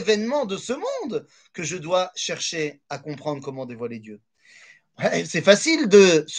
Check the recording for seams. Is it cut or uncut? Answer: uncut